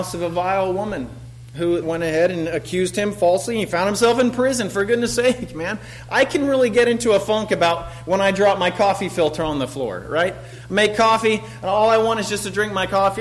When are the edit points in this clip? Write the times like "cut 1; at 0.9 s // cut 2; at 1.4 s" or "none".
cut 1; at 1.8 s